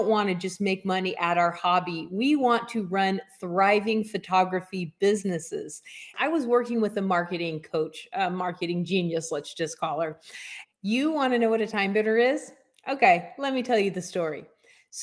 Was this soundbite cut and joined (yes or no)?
yes